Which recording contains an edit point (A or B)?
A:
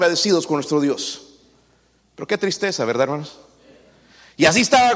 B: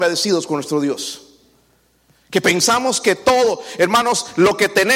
A